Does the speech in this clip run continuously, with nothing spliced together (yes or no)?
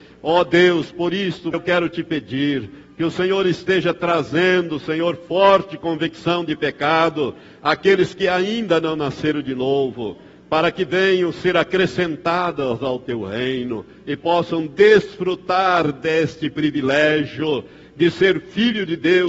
no